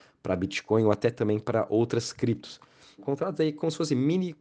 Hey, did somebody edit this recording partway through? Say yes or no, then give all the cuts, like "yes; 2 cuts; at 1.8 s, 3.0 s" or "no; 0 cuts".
yes; 1 cut; at 3.0 s